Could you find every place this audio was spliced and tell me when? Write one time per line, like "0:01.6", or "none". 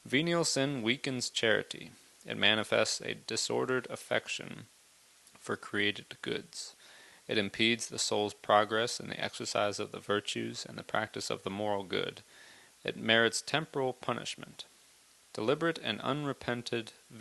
none